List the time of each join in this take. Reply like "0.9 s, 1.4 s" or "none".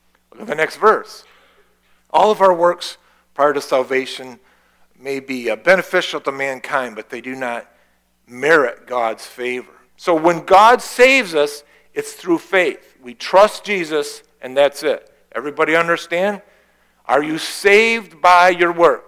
2.0 s, 9.9 s, 15.2 s